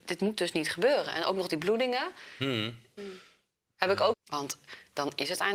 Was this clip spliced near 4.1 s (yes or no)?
yes